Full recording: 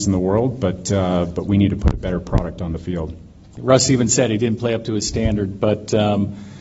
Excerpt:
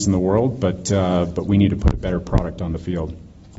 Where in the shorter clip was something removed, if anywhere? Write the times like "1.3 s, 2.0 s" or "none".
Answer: none